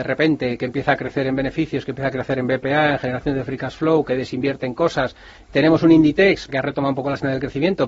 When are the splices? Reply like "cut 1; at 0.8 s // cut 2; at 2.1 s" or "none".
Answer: cut 1; at 5.4 s // cut 2; at 6.5 s